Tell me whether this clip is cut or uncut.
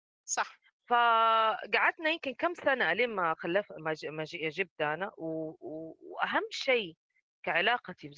uncut